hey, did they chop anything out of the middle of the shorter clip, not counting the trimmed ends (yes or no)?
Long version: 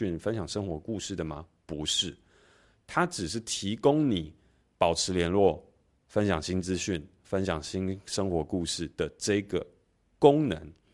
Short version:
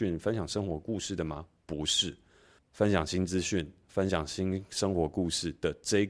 yes